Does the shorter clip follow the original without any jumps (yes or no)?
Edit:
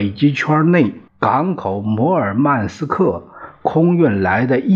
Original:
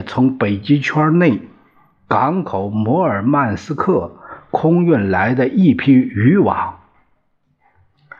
no